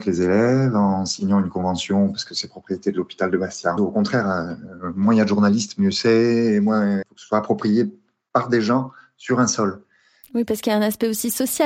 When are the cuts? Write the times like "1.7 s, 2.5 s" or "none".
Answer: 3.8 s, 7.0 s, 10.2 s